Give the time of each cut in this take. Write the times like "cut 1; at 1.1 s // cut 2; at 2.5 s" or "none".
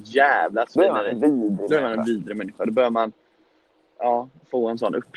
none